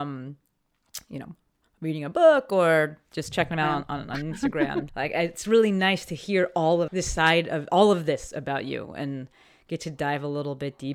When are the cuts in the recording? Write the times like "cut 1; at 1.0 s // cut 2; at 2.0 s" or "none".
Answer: cut 1; at 4.9 s // cut 2; at 6.9 s